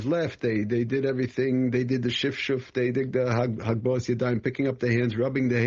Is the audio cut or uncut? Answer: uncut